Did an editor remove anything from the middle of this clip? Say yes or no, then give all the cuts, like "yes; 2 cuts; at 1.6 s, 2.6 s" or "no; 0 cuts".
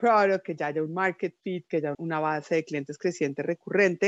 yes; 1 cut; at 1.9 s